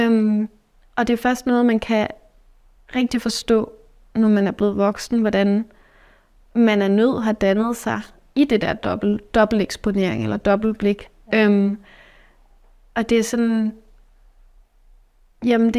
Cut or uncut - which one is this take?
uncut